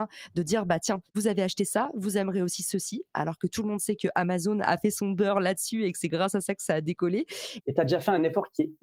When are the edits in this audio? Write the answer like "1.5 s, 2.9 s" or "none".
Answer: 7.6 s

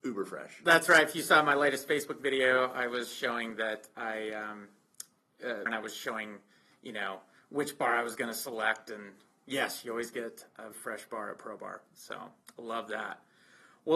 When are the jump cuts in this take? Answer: 5.7 s, 10.7 s

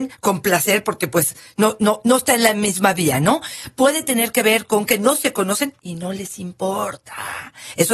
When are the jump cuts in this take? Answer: none

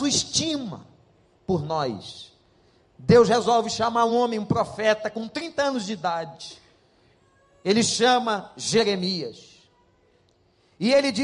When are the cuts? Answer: 4.1 s

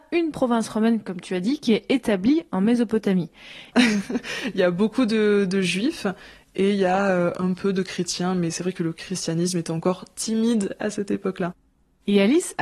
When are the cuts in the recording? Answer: 3.7 s

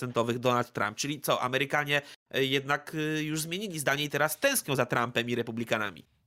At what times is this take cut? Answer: none

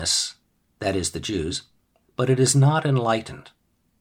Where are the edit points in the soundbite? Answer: 2.0 s

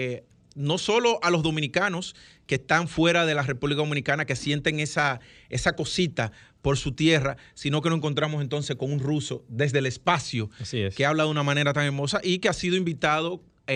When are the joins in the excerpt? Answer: none

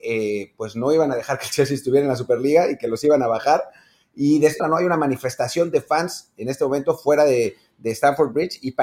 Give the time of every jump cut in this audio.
4.6 s

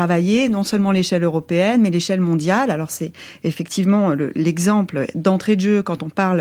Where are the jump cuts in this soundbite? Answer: none

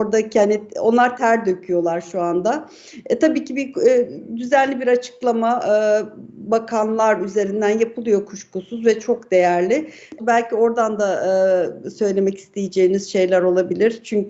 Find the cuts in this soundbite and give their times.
10.2 s

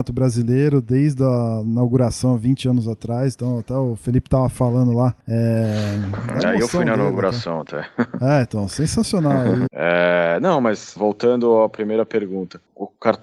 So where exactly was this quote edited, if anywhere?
9.7 s, 11.0 s

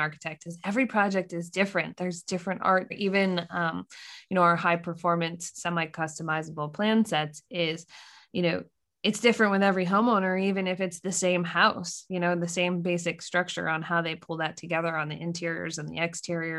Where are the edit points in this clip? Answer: 2.9 s

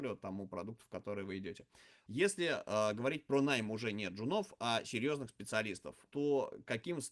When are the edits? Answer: 2.1 s

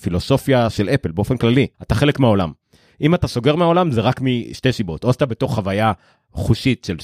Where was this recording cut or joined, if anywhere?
1.7 s

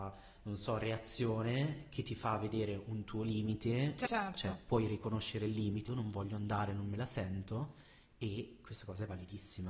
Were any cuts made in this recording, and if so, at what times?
4.0 s, 5.9 s

